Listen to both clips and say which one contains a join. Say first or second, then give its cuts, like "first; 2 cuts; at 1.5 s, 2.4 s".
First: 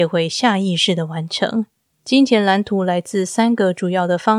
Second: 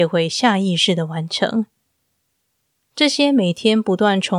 first; 1 cut; at 1.9 s